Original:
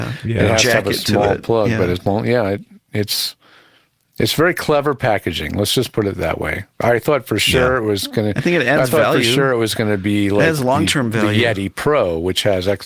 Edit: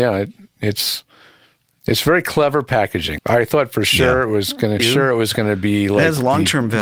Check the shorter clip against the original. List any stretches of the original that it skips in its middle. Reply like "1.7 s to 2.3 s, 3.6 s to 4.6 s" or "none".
5.5 s to 6.7 s, 8.3 s to 9.2 s

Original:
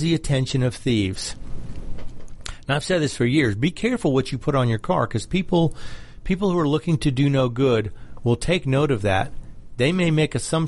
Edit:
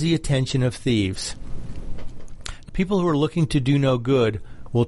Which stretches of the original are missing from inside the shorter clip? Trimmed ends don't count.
2.7 s to 6.2 s

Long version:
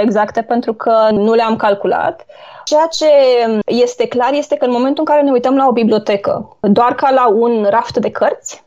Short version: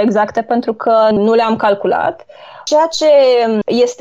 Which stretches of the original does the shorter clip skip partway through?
none

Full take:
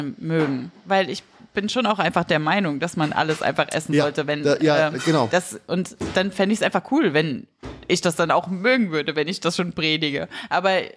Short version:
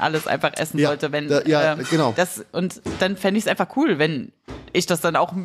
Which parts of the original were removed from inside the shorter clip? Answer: none

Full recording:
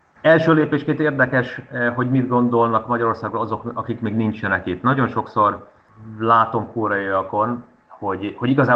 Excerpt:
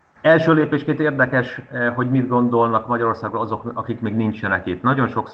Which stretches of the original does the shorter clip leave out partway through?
none

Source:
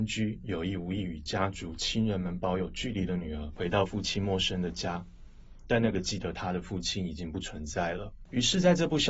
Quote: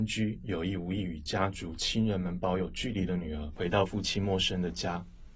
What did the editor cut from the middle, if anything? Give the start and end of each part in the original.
none

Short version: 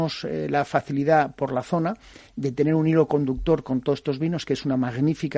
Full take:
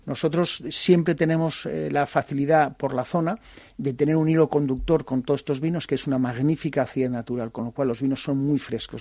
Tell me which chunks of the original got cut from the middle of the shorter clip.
none

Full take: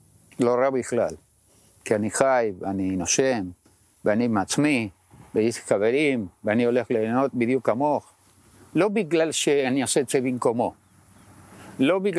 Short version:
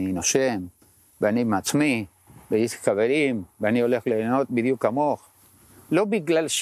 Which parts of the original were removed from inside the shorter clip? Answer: none

